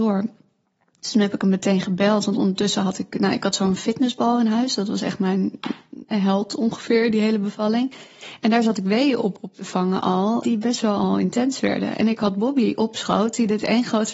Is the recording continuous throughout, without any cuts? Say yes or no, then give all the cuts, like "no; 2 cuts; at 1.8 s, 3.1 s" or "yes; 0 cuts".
no; 1 cut; at 10.4 s